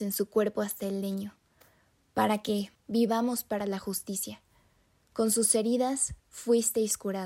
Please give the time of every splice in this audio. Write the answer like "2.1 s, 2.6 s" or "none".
2.8 s